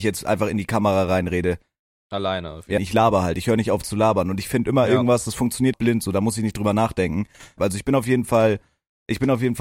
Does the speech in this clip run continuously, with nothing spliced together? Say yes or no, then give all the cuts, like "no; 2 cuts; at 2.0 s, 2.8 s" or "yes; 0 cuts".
no; 3 cuts; at 2.8 s, 5.7 s, 7.6 s